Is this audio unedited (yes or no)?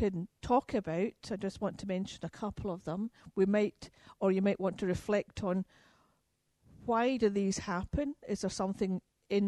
yes